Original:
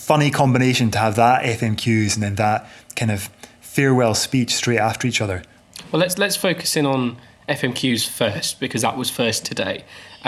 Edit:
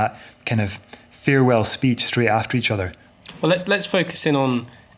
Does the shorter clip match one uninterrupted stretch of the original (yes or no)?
yes